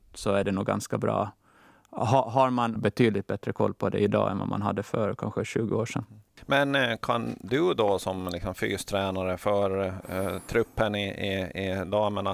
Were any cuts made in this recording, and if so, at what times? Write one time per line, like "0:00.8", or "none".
0:02.8